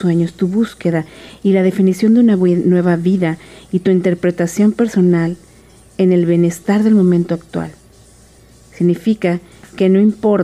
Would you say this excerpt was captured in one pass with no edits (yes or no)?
yes